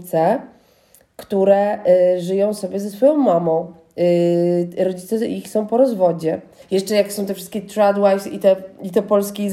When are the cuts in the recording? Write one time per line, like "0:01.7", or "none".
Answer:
0:06.6